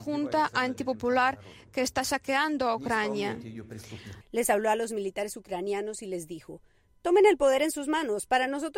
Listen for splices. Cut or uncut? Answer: cut